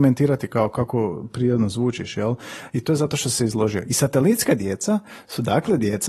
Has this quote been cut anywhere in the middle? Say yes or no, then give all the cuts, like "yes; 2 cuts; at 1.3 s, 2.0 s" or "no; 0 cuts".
no; 0 cuts